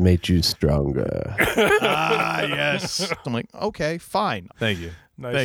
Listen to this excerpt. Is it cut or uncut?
cut